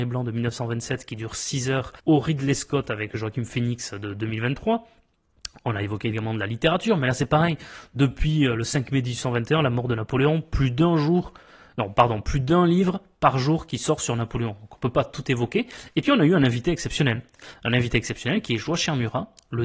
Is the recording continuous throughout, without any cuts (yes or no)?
no